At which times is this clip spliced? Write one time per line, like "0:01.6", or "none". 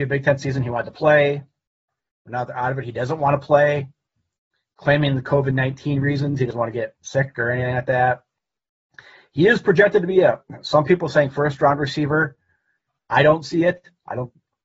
none